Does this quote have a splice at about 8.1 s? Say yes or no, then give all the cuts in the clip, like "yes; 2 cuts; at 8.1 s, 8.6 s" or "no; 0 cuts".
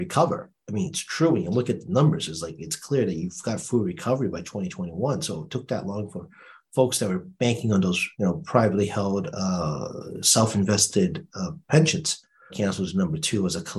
yes; 2 cuts; at 8.1 s, 12.5 s